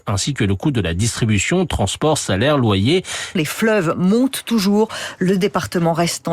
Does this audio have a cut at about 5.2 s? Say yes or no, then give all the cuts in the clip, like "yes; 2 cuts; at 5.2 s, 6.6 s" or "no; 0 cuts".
no; 1 cut; at 3.4 s